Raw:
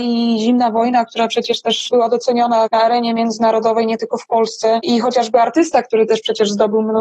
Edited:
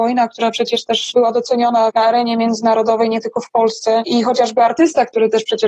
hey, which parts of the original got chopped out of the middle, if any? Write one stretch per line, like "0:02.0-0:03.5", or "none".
none